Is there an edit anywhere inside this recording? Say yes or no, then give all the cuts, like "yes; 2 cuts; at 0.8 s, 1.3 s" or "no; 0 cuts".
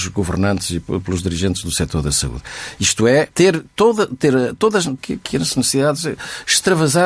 yes; 2 cuts; at 3.3 s, 5.0 s